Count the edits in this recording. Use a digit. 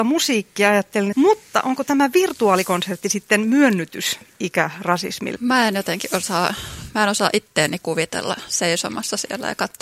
2